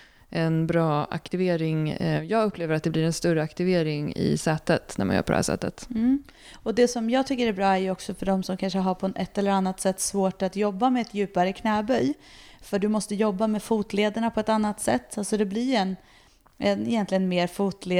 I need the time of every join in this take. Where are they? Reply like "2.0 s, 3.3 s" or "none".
none